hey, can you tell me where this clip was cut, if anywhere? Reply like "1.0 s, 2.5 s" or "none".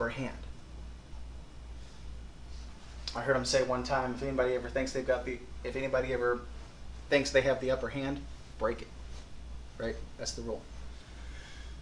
none